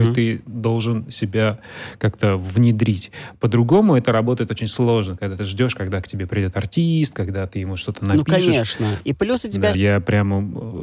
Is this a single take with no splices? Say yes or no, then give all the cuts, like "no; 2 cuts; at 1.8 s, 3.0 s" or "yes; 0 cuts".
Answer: no; 1 cut; at 9.7 s